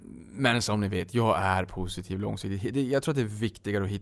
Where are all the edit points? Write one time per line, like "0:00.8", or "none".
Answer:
none

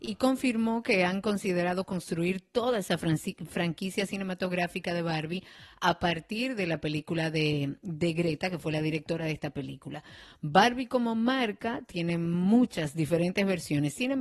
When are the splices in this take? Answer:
none

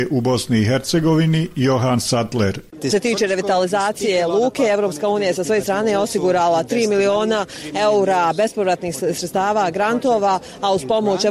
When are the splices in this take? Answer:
0:02.9

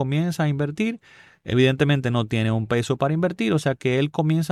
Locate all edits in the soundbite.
none

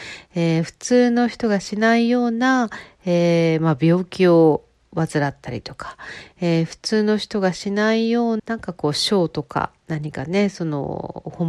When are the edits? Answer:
0:08.4

